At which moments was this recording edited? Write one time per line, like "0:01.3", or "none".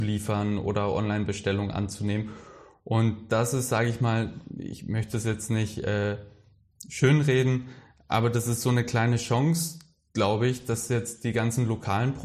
none